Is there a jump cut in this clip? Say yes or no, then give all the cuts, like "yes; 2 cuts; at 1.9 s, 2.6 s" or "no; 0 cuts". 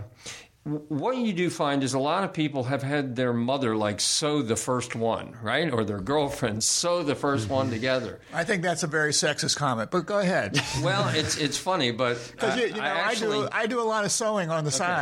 no; 0 cuts